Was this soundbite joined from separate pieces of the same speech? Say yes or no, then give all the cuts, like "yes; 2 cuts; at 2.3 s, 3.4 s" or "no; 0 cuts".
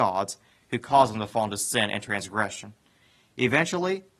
no; 0 cuts